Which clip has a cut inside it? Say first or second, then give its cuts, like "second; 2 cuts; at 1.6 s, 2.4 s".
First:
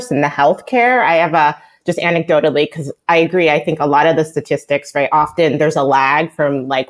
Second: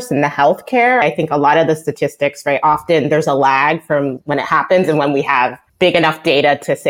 second; 3 cuts; at 1.0 s, 4.2 s, 5.7 s